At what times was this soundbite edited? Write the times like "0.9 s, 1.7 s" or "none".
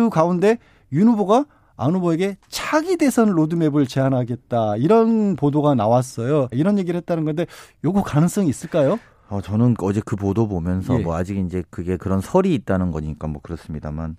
6.5 s